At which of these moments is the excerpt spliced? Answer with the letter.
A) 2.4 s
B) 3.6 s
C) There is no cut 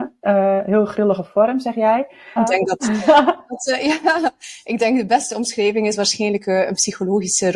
A